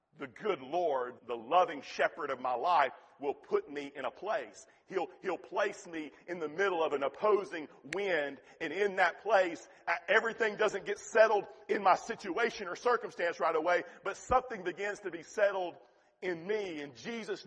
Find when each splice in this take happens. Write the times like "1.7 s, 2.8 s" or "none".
1.2 s